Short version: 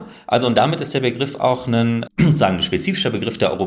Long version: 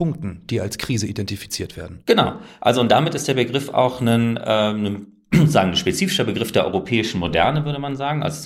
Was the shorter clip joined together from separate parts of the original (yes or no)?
yes